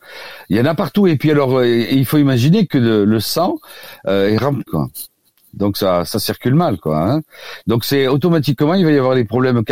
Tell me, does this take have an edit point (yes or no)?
yes